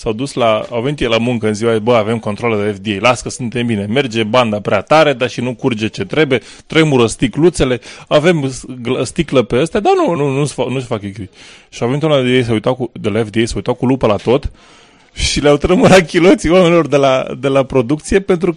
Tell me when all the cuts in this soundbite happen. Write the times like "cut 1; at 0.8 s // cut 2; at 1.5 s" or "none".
cut 1; at 10.2 s